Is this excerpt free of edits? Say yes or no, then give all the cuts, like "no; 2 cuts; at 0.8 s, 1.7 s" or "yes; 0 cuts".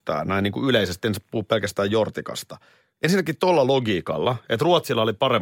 yes; 0 cuts